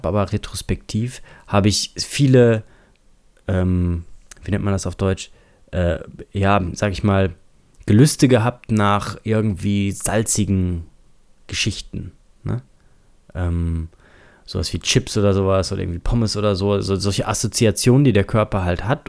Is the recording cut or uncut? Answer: uncut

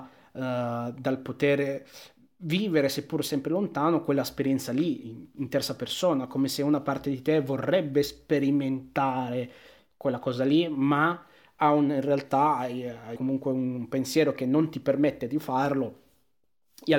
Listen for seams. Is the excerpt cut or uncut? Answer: cut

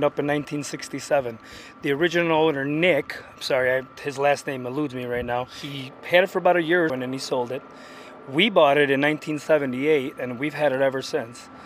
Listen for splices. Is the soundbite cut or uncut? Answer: cut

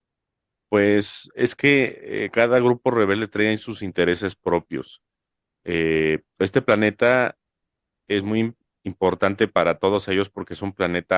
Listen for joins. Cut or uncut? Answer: cut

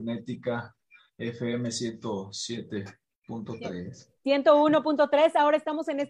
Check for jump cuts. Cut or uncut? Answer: cut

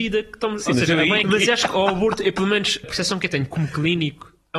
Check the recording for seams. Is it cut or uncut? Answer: cut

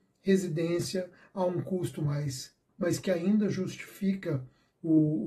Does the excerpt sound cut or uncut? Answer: cut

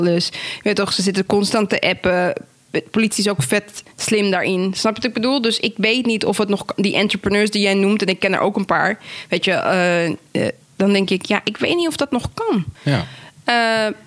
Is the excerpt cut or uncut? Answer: cut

